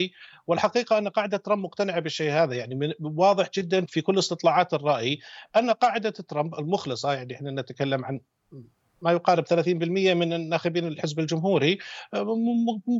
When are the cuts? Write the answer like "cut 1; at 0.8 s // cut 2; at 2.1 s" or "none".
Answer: cut 1; at 3.9 s

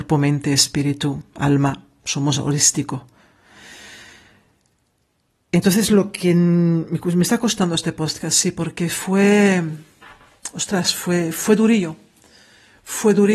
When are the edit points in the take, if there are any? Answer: none

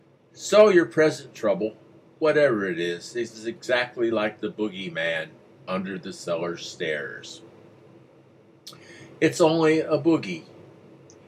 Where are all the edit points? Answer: none

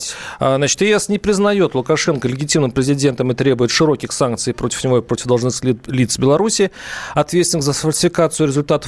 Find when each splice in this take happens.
none

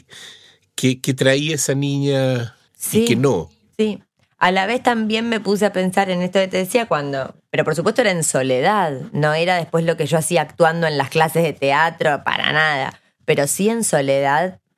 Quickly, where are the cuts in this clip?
cut 1; at 7.4 s

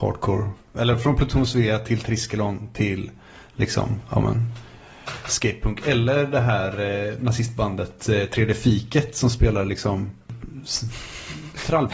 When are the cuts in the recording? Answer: none

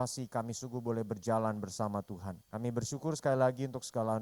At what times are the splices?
cut 1; at 2.4 s

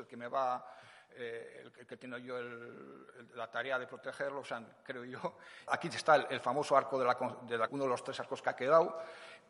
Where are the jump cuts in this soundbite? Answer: cut 1; at 5.7 s // cut 2; at 7.7 s

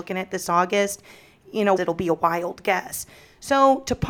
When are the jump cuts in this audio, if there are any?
cut 1; at 1.8 s

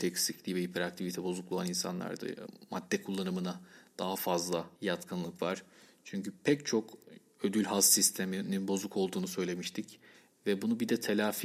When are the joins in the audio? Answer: cut 1; at 4.8 s

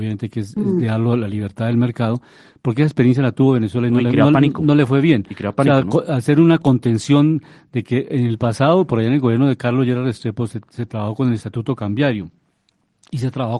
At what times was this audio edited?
none

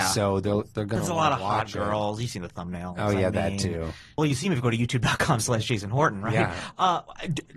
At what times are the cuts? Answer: cut 1; at 4.2 s

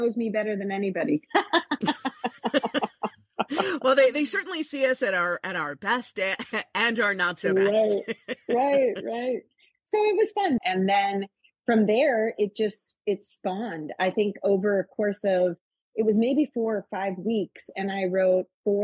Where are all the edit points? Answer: cut 1; at 10.6 s

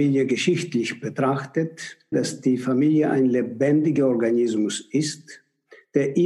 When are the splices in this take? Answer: cut 1; at 2.1 s

